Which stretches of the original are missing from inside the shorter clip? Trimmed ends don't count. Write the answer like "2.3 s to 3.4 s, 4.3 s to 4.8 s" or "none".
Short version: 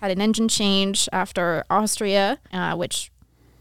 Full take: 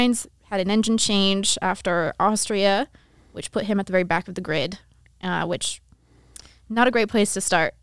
3.0 s to 5.2 s